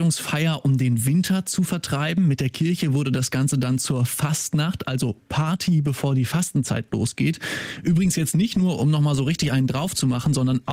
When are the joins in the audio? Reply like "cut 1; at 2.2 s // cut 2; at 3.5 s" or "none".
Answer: none